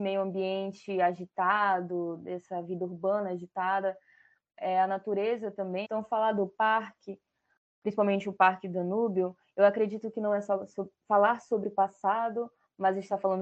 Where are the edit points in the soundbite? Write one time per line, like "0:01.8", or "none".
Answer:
0:05.8